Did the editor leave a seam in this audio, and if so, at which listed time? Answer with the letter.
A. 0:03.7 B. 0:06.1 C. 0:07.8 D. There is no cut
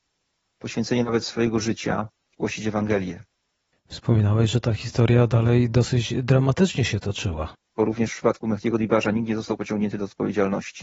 C